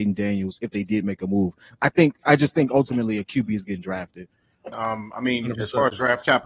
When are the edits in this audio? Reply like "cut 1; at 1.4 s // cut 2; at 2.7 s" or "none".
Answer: cut 1; at 4.7 s